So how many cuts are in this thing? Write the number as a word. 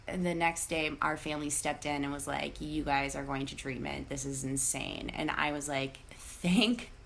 zero